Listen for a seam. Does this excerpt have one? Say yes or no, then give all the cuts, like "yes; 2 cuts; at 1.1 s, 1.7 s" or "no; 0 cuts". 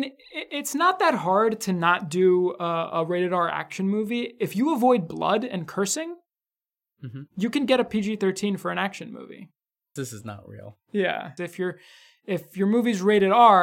yes; 2 cuts; at 10.0 s, 11.4 s